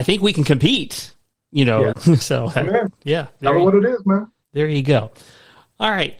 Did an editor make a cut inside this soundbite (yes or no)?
yes